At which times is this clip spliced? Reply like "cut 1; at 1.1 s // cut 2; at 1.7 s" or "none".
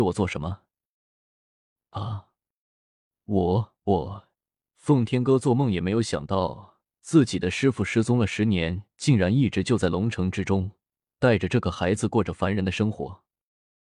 cut 1; at 4.3 s